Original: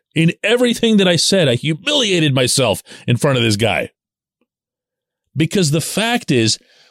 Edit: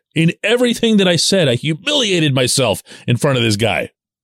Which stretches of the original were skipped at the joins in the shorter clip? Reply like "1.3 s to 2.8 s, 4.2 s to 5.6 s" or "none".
none